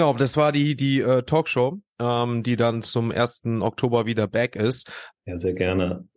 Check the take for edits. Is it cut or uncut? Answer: cut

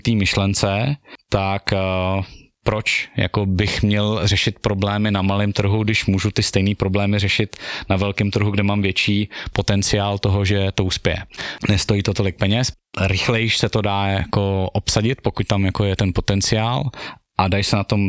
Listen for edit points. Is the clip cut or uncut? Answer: cut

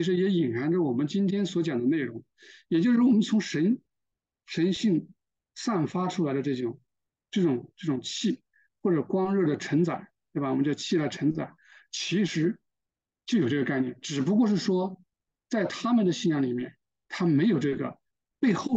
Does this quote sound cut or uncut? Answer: uncut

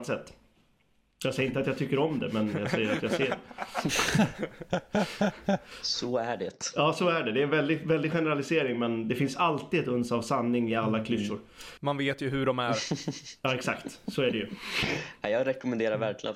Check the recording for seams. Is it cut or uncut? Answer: uncut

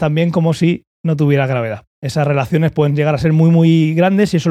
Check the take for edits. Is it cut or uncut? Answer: cut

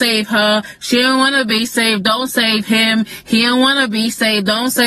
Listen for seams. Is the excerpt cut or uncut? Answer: uncut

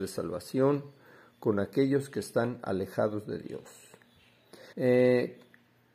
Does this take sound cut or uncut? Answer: cut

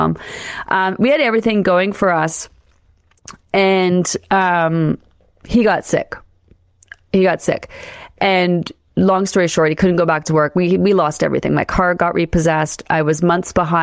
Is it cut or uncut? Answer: uncut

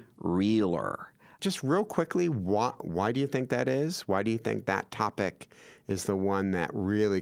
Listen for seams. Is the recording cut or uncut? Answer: cut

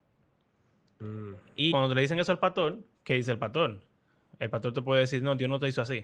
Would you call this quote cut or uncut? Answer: cut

